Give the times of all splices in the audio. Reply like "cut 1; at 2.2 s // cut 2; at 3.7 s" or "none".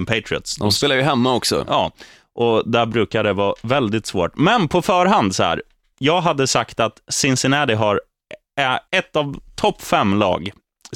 cut 1; at 5.9 s // cut 2; at 8.9 s